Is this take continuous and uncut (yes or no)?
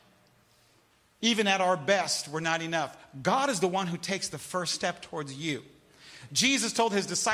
yes